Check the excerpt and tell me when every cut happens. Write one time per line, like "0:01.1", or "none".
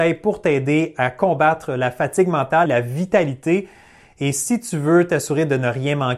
0:02.7